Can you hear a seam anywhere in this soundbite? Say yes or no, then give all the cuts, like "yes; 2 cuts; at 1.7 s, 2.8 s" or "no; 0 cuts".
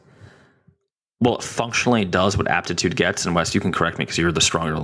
no; 0 cuts